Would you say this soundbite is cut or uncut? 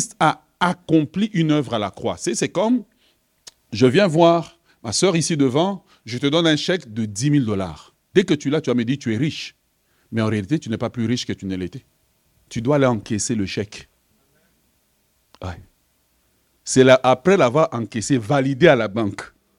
uncut